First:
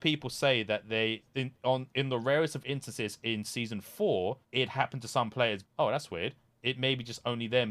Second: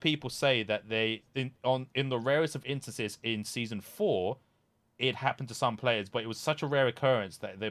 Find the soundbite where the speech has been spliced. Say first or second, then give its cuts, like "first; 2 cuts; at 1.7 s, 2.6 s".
first; 2 cuts; at 4.4 s, 5.6 s